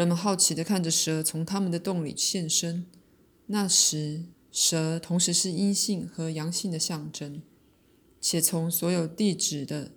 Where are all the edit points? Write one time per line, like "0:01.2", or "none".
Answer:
0:04.3
0:08.0